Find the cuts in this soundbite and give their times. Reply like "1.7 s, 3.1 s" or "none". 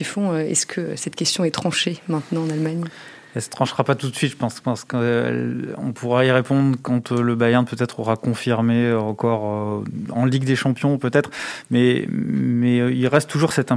none